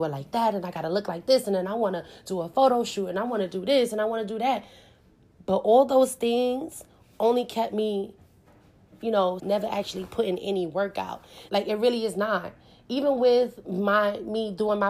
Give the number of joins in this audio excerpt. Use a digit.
2